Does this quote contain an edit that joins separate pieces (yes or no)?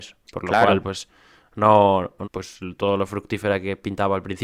yes